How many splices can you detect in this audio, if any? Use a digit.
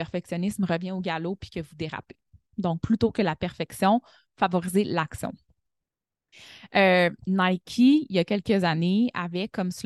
1